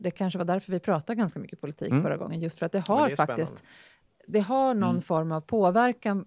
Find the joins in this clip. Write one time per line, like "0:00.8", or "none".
none